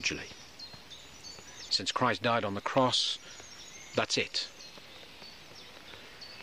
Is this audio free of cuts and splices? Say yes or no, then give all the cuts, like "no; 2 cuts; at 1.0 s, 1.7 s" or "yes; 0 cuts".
no; 1 cut; at 1.7 s